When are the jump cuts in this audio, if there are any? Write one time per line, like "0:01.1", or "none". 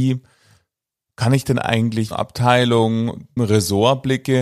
0:02.1
0:03.4